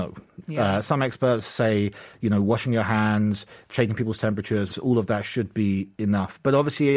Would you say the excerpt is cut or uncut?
cut